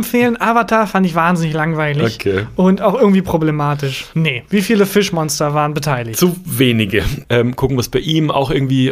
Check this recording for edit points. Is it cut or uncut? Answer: cut